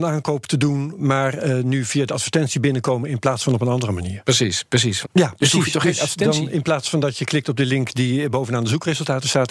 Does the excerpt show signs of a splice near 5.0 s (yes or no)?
yes